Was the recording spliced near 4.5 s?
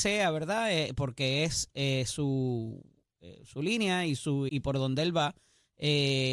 yes; 1 cut; at 4.5 s

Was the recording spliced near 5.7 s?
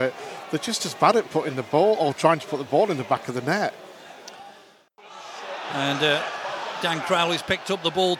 no; 0 cuts

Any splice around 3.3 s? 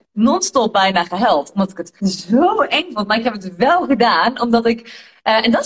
no; 1 cut; at 2.0 s

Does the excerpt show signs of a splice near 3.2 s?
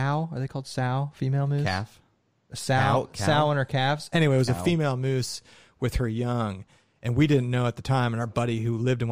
no; 0 cuts

